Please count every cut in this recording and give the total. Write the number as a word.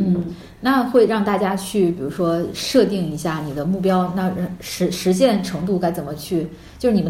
zero